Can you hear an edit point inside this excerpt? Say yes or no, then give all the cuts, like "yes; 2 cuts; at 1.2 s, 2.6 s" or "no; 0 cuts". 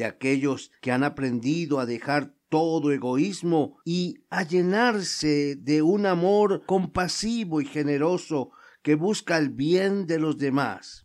no; 0 cuts